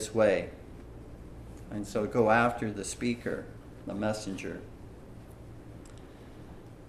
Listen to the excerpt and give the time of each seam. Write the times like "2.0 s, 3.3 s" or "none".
1.6 s